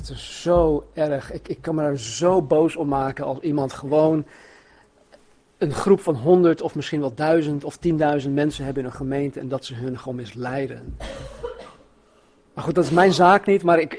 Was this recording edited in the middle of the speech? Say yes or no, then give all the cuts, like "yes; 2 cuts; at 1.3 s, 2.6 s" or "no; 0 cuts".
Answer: no; 0 cuts